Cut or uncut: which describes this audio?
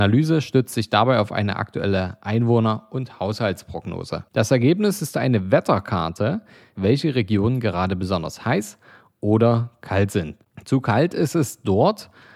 cut